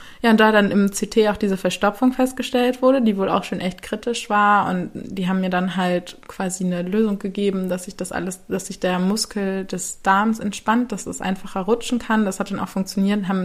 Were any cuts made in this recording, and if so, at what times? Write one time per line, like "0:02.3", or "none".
none